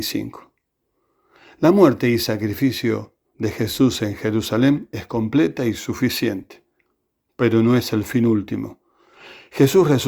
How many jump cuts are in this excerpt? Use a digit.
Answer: 0